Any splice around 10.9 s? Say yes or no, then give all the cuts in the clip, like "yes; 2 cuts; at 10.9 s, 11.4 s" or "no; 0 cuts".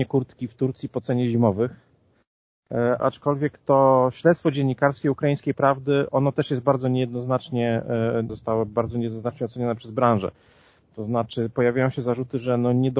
no; 2 cuts; at 3.0 s, 8.3 s